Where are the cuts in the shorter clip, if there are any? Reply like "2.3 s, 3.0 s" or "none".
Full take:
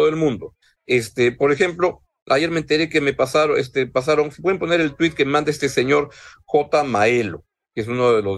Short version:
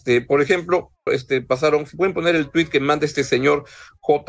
1.1 s